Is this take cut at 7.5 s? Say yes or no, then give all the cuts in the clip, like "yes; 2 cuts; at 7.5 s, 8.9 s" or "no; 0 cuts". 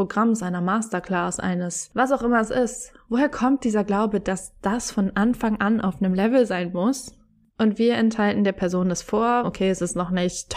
yes; 2 cuts; at 7.5 s, 9.4 s